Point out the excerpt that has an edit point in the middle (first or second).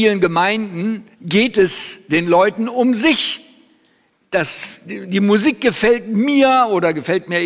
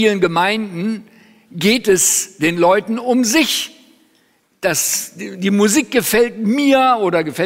first